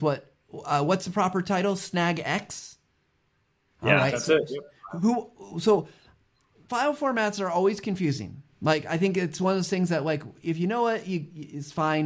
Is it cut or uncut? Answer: uncut